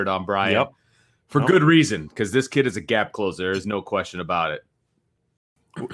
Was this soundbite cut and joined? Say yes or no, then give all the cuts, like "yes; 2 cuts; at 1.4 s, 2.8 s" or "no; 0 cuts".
no; 0 cuts